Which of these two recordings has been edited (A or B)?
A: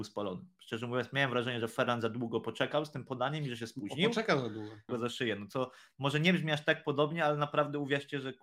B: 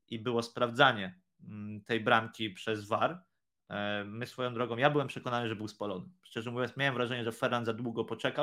A